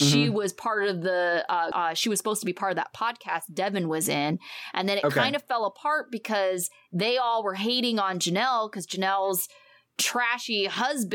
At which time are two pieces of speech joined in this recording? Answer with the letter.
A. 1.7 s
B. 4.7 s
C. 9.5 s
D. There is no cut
A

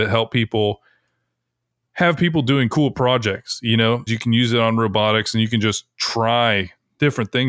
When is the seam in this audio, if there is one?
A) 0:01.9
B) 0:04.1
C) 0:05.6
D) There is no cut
B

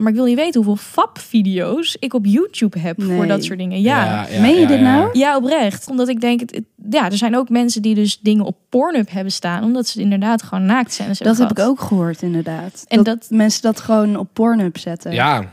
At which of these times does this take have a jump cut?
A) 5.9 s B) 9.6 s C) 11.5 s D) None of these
A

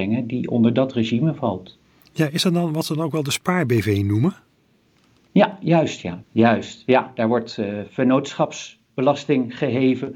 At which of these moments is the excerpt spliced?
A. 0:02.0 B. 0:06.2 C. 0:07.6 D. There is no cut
B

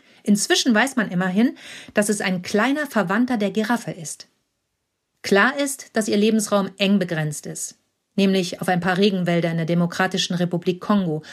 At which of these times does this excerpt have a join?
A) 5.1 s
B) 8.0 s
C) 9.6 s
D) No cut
A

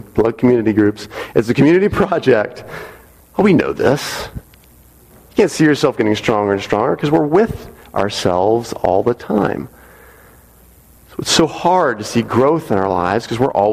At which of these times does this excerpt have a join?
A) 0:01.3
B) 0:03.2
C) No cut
B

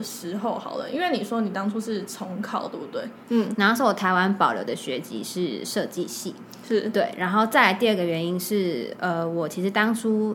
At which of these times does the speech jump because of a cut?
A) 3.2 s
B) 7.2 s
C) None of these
A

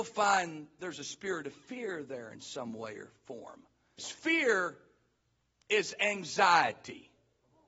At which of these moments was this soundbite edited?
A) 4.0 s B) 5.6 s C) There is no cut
A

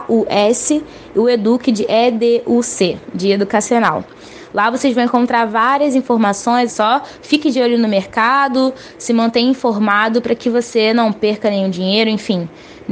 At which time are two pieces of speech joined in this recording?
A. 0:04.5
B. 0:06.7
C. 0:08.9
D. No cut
B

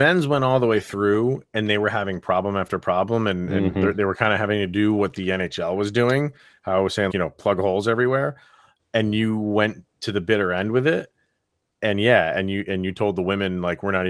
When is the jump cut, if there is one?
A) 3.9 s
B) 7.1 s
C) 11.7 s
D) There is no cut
B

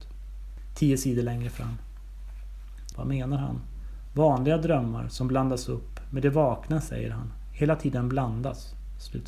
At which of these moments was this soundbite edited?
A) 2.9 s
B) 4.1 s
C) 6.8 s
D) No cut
A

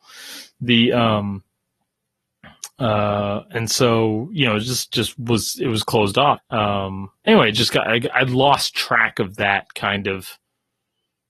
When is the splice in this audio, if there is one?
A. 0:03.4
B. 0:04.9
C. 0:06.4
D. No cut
C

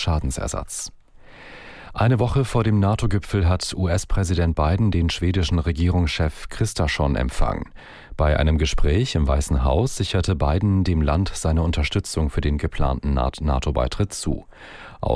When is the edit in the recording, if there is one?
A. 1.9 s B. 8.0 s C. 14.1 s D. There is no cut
D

